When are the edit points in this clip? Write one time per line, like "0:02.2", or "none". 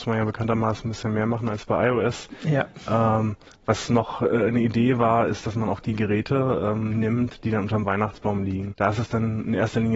0:08.7